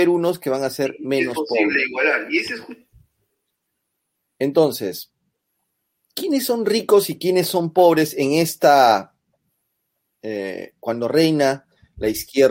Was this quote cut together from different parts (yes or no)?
no